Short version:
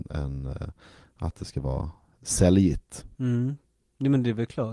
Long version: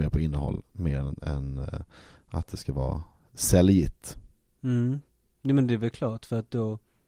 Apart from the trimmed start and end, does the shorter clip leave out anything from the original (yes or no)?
yes